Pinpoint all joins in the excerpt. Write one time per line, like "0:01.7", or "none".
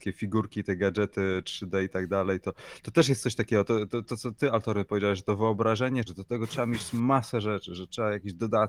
0:06.1